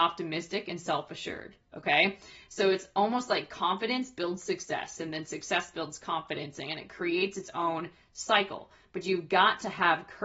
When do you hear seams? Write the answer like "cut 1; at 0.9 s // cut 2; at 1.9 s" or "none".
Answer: none